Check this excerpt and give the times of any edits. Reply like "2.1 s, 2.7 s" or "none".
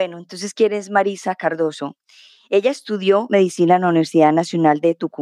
none